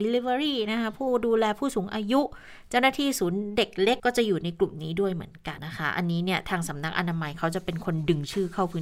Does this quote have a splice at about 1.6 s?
no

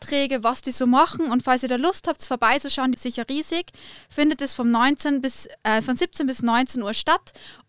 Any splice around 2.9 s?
yes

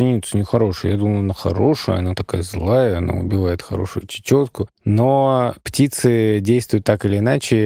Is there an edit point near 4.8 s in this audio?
no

